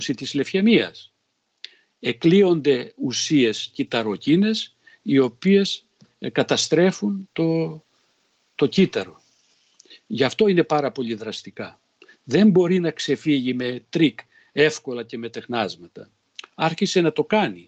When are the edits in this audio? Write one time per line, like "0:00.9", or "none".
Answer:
none